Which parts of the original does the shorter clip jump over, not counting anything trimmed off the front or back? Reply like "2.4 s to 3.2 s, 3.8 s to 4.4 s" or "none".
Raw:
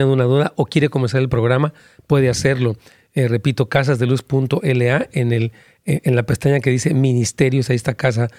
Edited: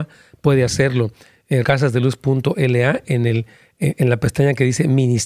3.3 s to 3.7 s